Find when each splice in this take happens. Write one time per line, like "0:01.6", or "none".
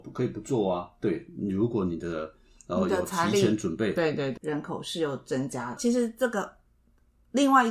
0:04.4
0:05.8